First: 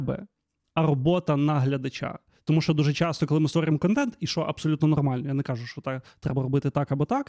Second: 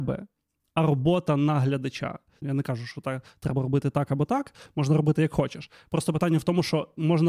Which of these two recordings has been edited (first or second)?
second